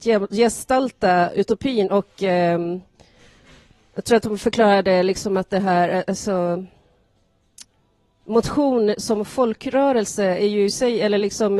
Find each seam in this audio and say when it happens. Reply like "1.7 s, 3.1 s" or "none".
none